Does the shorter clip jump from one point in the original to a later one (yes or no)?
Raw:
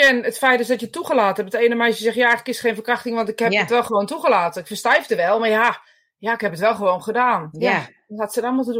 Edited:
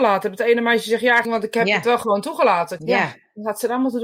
yes